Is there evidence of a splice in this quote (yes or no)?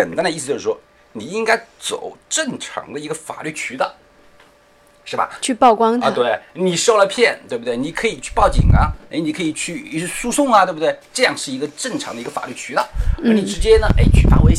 no